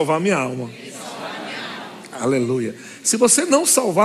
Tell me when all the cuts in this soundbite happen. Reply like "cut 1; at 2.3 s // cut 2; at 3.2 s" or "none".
none